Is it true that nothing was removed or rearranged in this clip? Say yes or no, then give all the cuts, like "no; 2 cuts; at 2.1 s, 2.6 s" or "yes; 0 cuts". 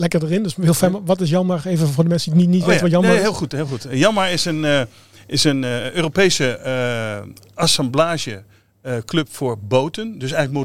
yes; 0 cuts